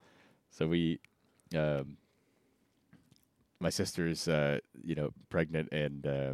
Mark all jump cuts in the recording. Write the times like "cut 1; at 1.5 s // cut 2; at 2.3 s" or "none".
none